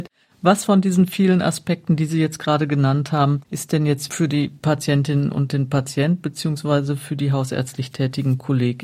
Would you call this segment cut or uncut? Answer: cut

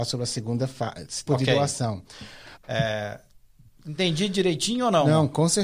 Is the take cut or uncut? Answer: cut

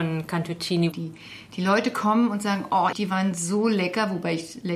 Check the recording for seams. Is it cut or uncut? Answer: cut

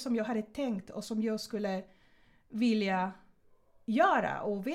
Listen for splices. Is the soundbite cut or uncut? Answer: uncut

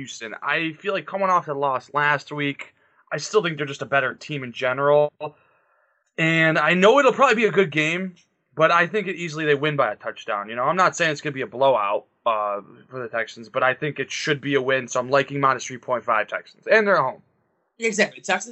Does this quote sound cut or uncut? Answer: uncut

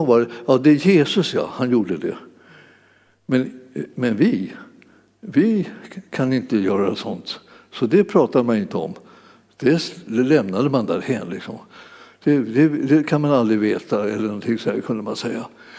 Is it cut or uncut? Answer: uncut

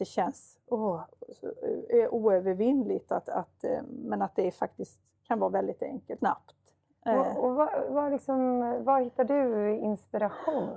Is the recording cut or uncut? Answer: cut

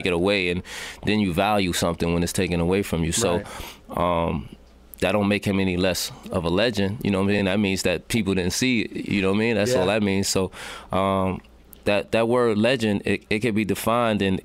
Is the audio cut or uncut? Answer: uncut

